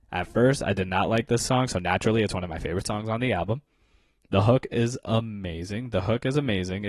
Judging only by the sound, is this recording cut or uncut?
uncut